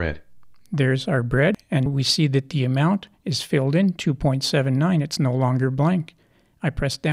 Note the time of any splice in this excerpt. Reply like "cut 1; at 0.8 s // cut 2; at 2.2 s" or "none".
cut 1; at 1.9 s

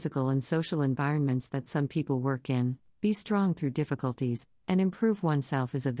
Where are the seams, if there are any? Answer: cut 1; at 2.9 s

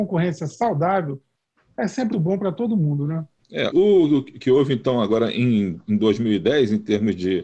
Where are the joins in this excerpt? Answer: cut 1; at 2.1 s // cut 2; at 3.7 s

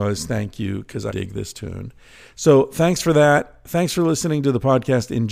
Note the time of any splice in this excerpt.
cut 1; at 1.1 s

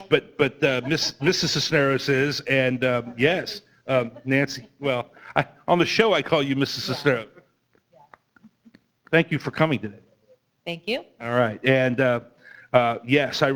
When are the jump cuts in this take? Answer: none

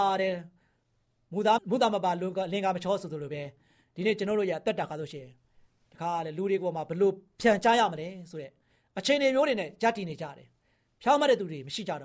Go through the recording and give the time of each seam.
cut 1; at 1.6 s

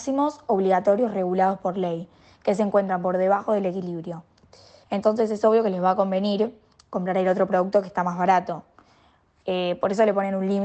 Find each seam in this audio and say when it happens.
cut 1; at 4.8 s

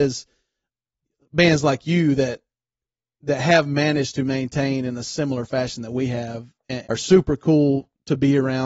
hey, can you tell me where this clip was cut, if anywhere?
cut 1; at 6.8 s

